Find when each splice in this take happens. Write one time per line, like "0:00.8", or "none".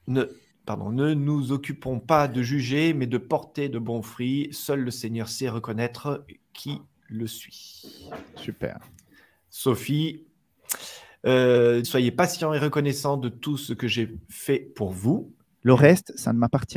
0:11.8
0:15.6